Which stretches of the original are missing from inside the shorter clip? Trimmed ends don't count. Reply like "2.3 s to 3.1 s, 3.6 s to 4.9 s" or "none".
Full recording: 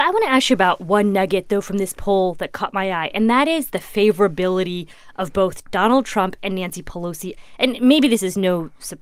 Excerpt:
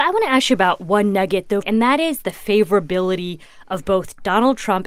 1.6 s to 3.1 s